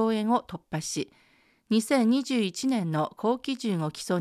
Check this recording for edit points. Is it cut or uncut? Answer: uncut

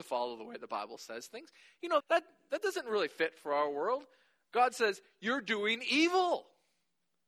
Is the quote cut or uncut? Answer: cut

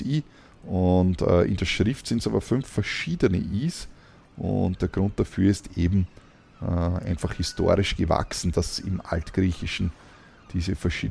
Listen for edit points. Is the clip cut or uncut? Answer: uncut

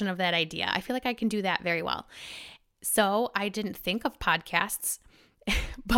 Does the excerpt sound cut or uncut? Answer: uncut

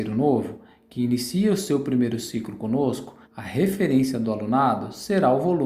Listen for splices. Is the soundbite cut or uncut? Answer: cut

